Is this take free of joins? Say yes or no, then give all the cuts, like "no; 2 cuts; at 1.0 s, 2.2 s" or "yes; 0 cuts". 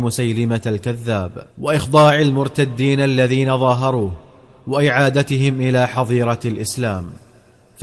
no; 1 cut; at 1.5 s